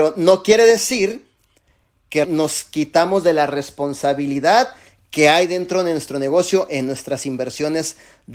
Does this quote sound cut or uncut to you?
cut